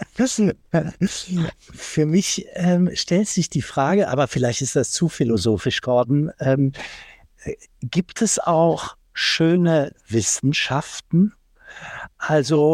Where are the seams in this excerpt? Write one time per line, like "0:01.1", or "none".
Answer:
none